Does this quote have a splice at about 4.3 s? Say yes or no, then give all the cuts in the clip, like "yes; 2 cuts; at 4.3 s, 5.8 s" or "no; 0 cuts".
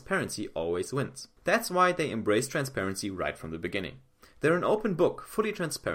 no; 1 cut; at 1.4 s